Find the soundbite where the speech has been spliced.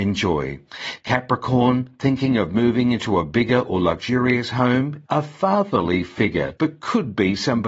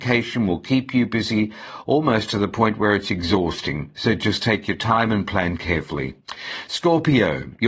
first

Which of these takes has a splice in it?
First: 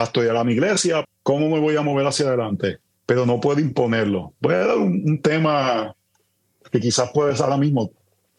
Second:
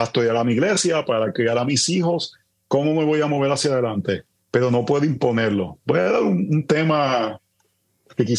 first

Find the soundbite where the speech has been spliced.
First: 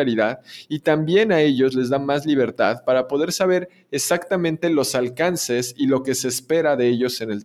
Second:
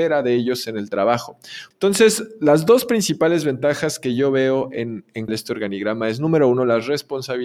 second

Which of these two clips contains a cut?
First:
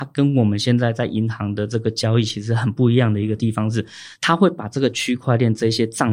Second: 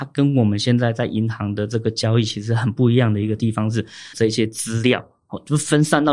second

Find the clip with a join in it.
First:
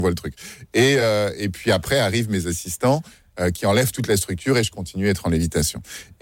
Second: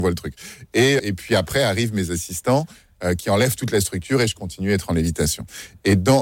second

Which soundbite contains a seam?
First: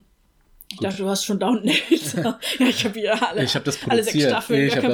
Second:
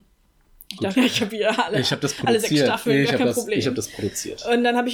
second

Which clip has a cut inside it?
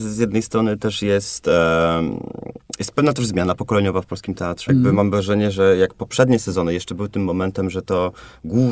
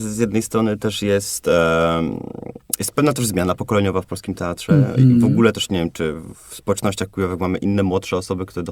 first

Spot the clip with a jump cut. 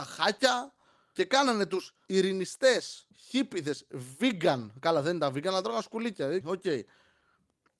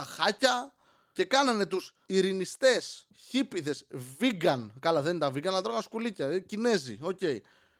first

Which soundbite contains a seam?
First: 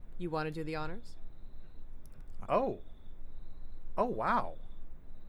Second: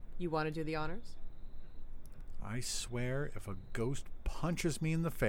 first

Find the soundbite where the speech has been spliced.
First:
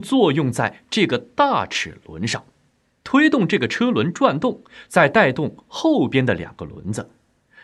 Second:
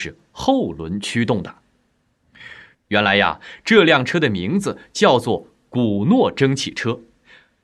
second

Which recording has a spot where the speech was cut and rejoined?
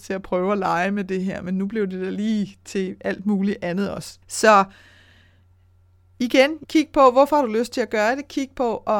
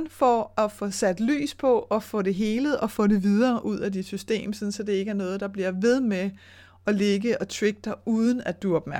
first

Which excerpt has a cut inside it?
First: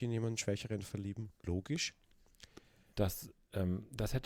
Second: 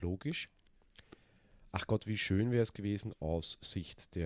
first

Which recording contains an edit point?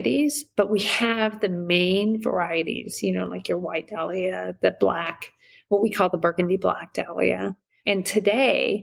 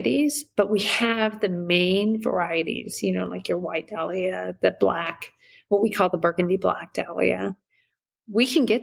first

